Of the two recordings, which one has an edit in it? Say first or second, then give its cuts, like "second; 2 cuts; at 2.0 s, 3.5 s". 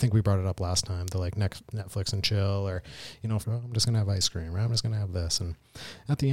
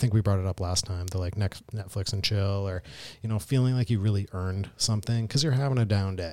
first; 1 cut; at 3.4 s